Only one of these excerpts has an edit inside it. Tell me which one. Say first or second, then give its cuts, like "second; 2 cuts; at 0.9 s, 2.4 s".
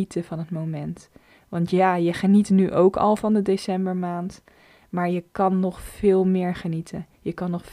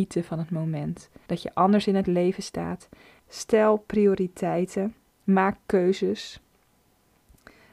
second; 2 cuts; at 1.3 s, 3.2 s